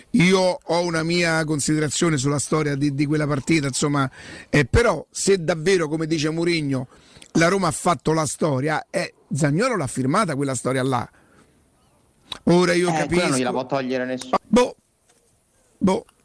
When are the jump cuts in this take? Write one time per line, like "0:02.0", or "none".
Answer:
0:14.4

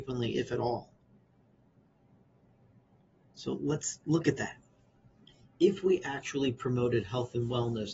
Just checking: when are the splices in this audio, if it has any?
none

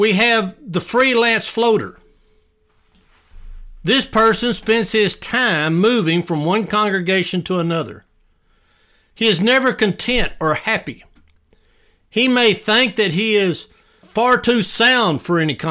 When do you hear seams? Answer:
0:14.0

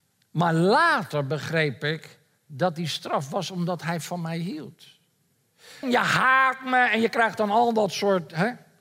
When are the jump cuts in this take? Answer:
0:05.8

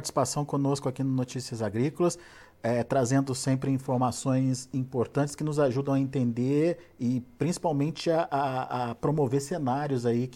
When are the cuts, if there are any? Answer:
none

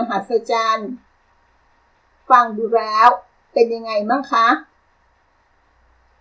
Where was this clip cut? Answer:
none

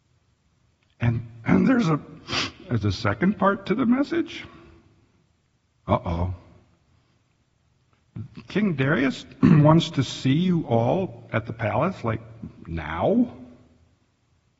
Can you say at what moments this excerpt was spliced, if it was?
0:01.4

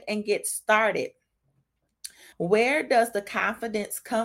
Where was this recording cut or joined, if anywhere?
0:02.3

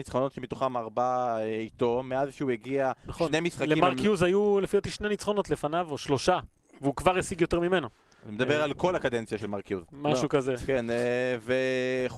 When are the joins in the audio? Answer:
none

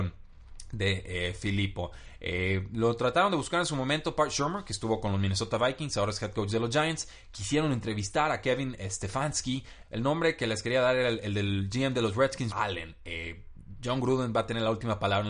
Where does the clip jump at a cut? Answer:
0:09.8
0:12.5

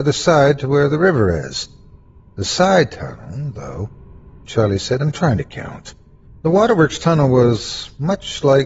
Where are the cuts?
0:04.4
0:06.3

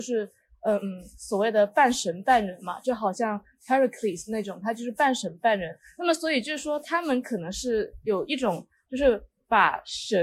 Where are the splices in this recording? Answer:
none

